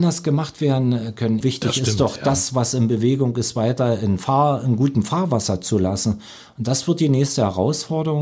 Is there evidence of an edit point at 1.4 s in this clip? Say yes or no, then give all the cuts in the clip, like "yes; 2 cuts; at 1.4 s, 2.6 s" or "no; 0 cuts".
yes; 1 cut; at 1.4 s